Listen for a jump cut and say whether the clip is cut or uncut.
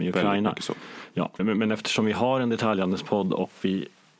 cut